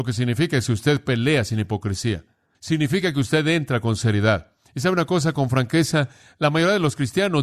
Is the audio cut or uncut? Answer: uncut